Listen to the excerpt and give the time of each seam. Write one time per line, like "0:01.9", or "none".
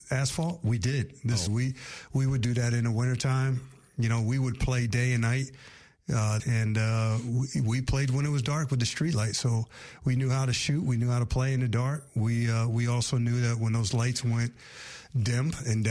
0:01.5
0:06.4